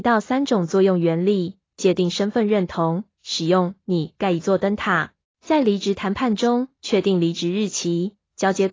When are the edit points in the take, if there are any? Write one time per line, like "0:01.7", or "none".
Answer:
0:05.2
0:06.7